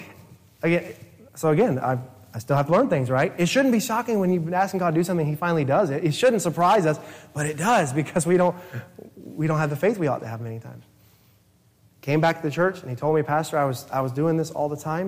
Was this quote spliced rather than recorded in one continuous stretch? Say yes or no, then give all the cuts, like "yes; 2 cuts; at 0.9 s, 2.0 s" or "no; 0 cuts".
no; 0 cuts